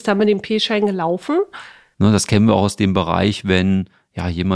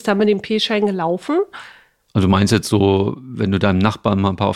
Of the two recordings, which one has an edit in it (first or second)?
first